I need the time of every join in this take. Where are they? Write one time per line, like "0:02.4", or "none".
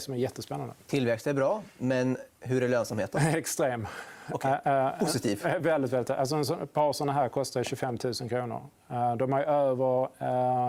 none